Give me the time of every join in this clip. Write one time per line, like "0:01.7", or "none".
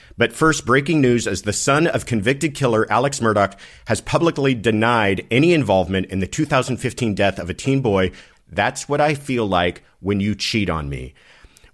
0:08.3